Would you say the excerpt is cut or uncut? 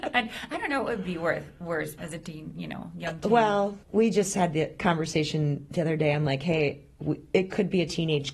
cut